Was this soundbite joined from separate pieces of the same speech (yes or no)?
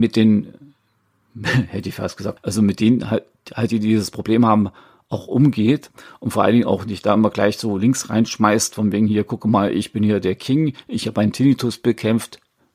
yes